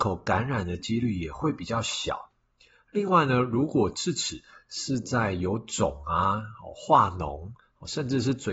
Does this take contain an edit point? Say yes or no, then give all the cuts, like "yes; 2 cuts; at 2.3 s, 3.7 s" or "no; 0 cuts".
no; 0 cuts